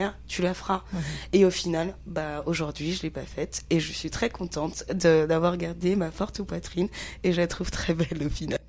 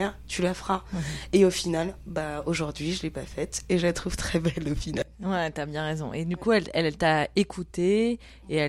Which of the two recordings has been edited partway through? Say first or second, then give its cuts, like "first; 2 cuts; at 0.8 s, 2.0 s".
second; 1 cut; at 3.7 s